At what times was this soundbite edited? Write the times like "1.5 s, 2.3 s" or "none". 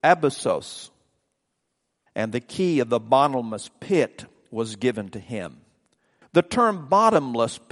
2.1 s, 6.2 s